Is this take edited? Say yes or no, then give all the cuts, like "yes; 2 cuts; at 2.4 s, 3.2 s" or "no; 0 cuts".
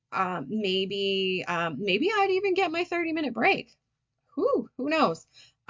no; 0 cuts